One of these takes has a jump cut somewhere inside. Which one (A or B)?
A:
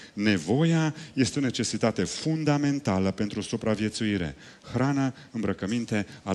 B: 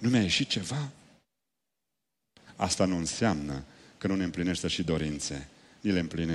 B